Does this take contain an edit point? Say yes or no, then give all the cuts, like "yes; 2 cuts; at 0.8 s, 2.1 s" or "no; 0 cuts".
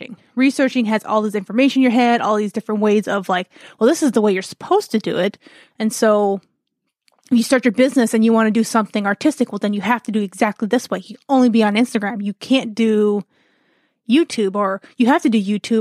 no; 0 cuts